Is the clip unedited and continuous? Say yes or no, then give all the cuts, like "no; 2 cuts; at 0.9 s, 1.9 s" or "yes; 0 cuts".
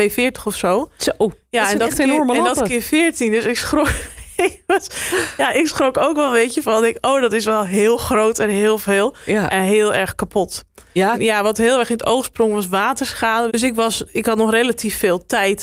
no; 2 cuts; at 11.1 s, 13.5 s